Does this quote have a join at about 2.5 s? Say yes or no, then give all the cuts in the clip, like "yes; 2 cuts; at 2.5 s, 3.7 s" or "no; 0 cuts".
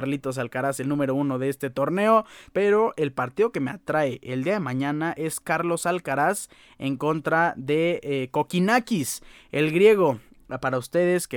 yes; 1 cut; at 2.5 s